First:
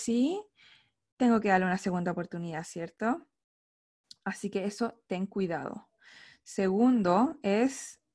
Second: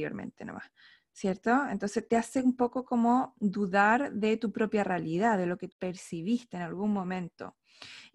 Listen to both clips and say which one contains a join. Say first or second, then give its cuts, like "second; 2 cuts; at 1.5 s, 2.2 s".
second; 1 cut; at 5.7 s